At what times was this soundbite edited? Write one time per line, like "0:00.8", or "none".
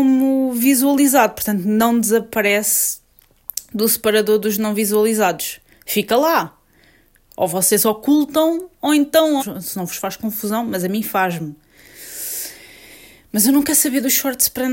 0:09.4